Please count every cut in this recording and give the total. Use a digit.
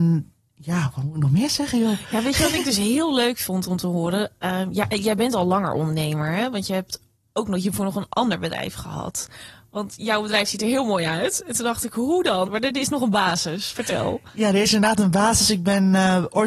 1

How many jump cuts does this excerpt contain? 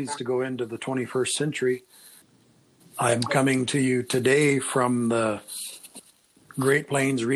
1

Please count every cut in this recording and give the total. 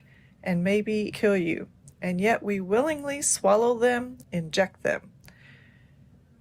2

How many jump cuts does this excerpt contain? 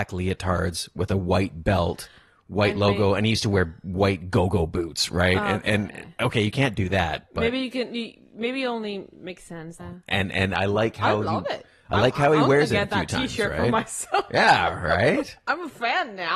1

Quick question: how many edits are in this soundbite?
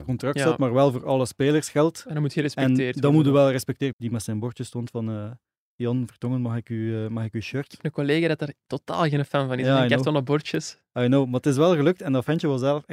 1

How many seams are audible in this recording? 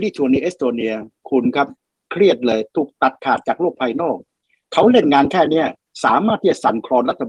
0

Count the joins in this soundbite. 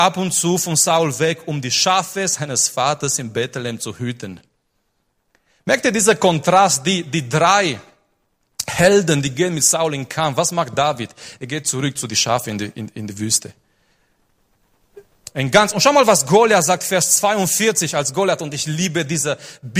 1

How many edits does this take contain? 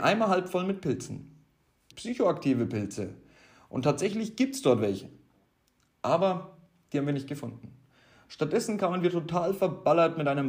1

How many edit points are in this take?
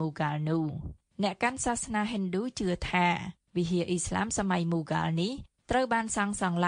0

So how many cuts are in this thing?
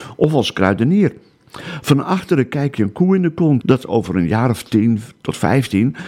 1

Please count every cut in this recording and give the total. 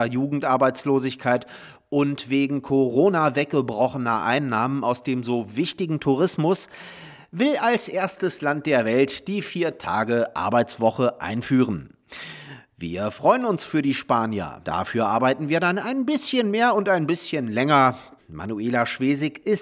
2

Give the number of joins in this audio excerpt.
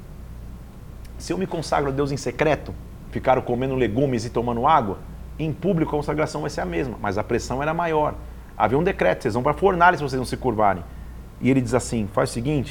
2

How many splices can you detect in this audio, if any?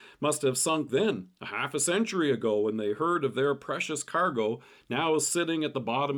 0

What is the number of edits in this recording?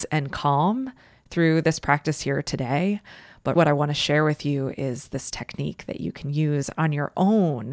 1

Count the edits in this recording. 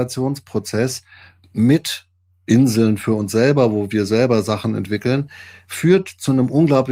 0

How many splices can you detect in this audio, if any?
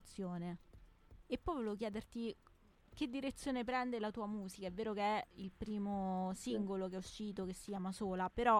1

